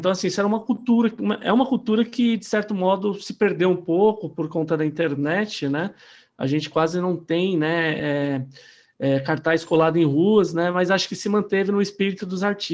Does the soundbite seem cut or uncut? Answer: uncut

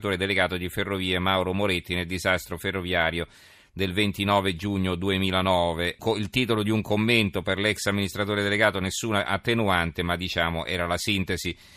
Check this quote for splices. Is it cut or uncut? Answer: cut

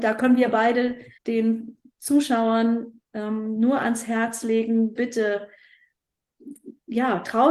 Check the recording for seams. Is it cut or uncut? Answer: cut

